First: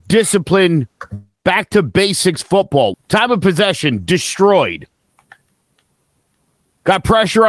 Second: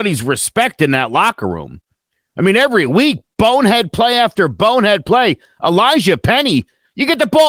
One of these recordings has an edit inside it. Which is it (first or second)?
first